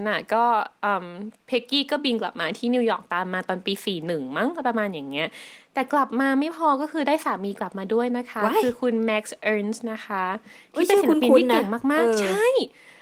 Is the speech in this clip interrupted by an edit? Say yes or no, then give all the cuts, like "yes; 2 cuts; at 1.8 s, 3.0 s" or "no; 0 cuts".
no; 0 cuts